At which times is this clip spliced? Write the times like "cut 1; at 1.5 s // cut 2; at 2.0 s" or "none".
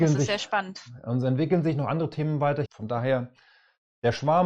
cut 1; at 2.7 s